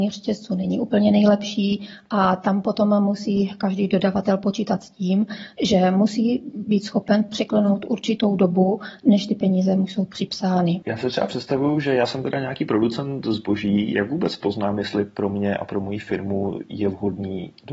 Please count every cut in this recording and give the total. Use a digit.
1